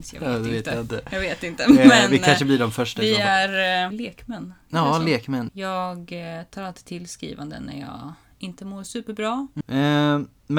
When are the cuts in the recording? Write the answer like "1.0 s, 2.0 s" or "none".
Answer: 3.9 s, 5.5 s, 9.6 s